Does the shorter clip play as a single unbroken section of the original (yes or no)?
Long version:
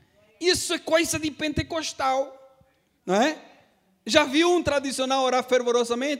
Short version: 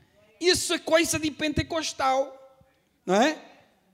yes